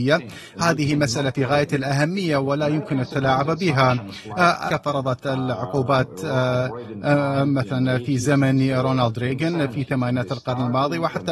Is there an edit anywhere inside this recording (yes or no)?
yes